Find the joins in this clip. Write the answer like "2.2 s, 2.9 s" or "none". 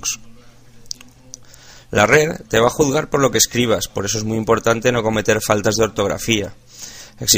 none